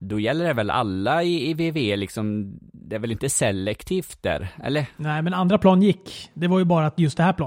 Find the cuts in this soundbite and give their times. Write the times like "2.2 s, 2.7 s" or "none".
none